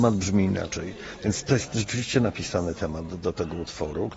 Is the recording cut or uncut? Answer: uncut